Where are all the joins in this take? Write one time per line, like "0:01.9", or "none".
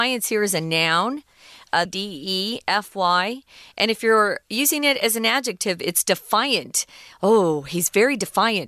0:01.9